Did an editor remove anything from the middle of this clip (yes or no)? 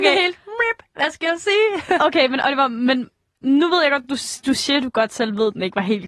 no